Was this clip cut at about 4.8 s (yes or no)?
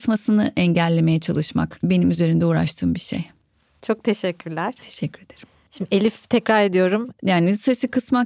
yes